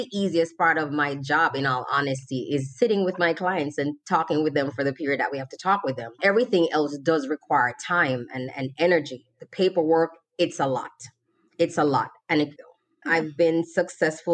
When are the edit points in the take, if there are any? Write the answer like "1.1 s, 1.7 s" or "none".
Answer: 12.6 s

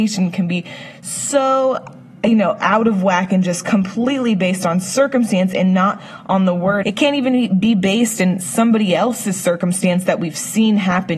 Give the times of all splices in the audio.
6.8 s

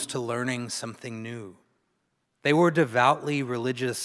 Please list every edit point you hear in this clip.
2.3 s

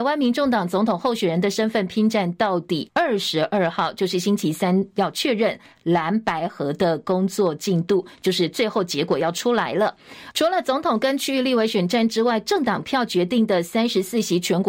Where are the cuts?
2.9 s, 10.3 s

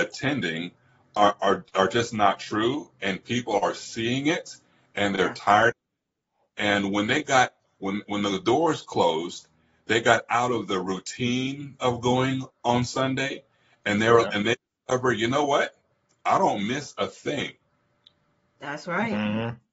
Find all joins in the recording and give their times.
none

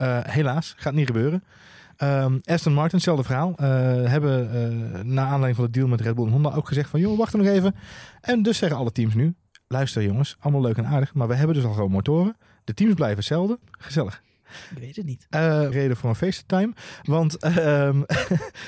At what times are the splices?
13.6 s, 15.7 s

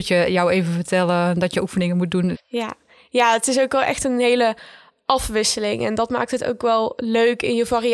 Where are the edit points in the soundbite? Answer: 2.3 s

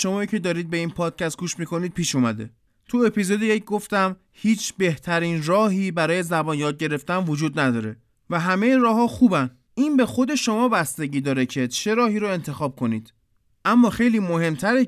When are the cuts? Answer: none

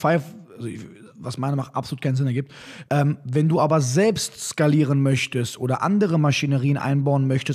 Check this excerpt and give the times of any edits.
2.8 s

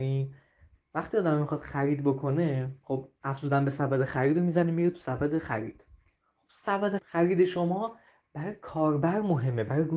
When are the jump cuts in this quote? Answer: 7.0 s

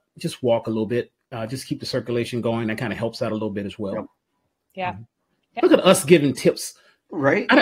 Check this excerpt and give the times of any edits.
none

